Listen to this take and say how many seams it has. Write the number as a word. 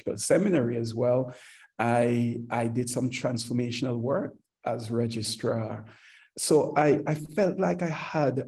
zero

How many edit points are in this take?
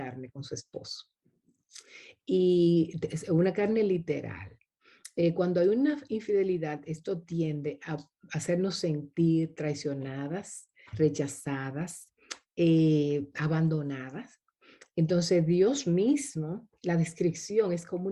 two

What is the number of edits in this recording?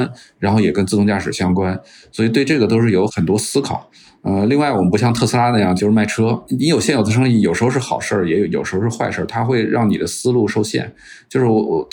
one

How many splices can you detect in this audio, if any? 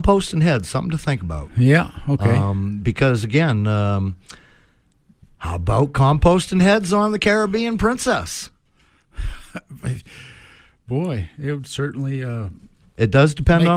zero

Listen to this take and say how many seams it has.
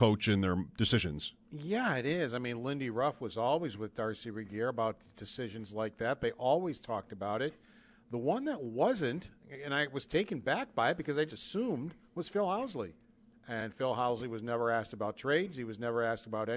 two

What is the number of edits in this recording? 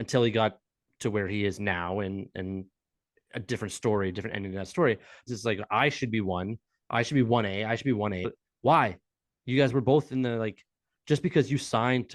two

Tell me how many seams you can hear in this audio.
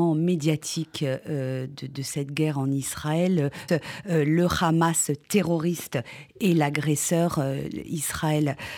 one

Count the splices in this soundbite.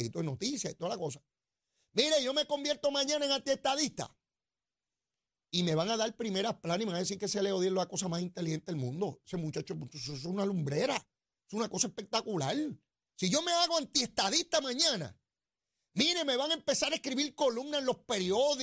zero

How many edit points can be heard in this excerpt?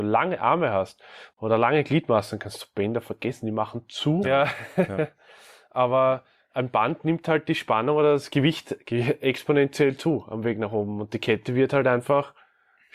two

